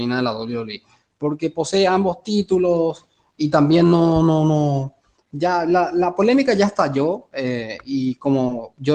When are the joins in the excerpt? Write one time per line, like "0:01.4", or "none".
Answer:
0:05.3